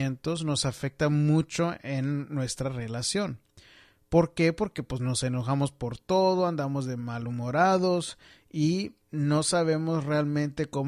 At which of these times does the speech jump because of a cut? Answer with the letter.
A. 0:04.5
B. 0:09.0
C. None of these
B